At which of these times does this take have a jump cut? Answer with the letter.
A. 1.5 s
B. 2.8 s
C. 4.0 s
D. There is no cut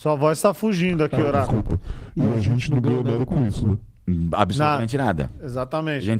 D